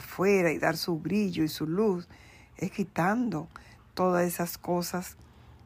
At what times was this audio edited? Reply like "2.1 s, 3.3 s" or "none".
none